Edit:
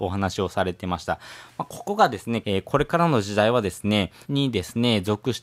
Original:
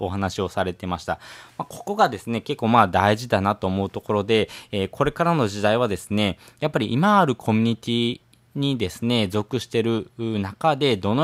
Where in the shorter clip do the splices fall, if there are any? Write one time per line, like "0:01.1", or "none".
0:02.4
0:04.2